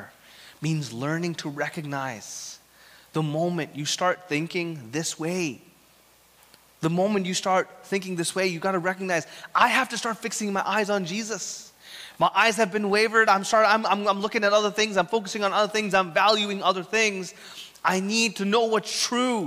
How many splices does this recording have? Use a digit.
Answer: 0